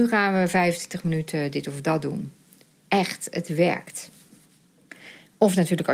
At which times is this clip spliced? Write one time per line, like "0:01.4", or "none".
none